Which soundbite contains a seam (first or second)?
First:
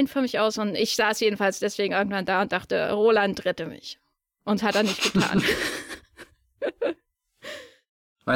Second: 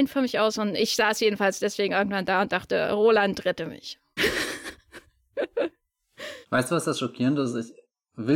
second